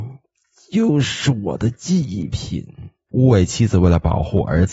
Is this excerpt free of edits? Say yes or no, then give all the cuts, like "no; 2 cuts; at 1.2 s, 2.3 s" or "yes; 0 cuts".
no; 1 cut; at 3.1 s